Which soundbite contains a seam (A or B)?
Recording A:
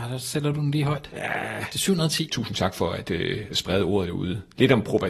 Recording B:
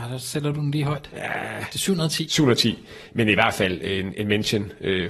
A